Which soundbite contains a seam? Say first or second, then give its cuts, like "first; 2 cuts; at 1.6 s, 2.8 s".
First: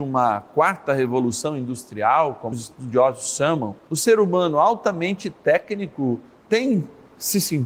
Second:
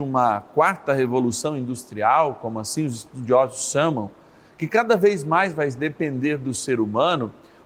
first; 2 cuts; at 2.5 s, 3.9 s